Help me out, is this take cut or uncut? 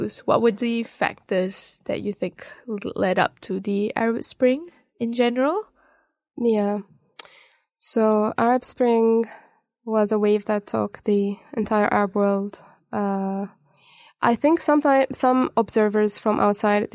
uncut